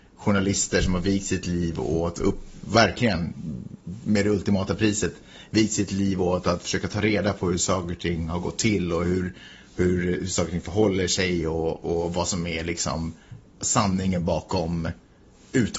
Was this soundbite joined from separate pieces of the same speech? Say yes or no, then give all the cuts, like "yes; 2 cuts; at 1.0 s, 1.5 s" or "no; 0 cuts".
no; 0 cuts